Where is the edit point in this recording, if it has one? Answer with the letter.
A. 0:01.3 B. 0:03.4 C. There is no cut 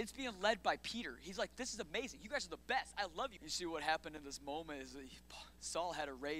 B